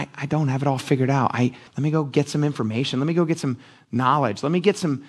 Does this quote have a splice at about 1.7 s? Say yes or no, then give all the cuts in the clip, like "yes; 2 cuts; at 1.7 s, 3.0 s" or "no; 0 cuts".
yes; 1 cut; at 1.7 s